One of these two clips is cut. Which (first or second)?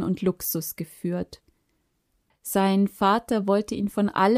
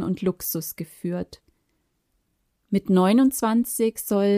first